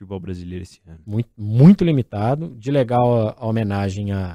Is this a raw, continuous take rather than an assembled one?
yes; 0 cuts

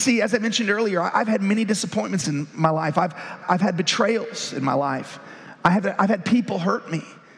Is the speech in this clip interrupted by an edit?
yes; 1 cut; at 3.4 s

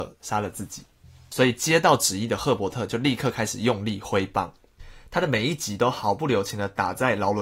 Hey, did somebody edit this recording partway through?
no; 0 cuts

